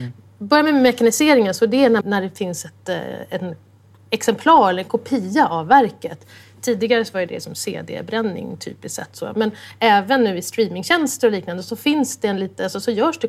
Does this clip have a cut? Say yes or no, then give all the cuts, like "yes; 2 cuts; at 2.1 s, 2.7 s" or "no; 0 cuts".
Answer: yes; 1 cut; at 2.0 s